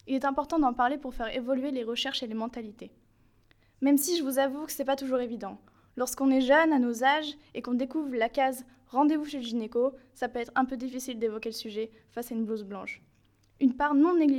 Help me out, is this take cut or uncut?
uncut